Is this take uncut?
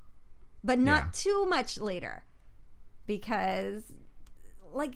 yes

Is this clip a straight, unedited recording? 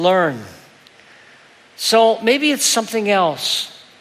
yes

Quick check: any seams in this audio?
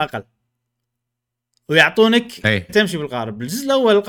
yes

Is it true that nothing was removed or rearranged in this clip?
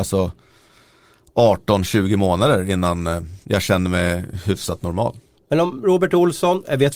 no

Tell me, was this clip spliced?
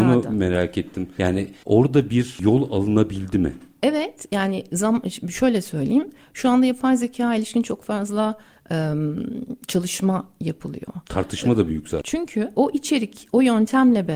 yes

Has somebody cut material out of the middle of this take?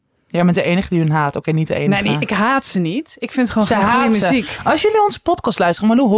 no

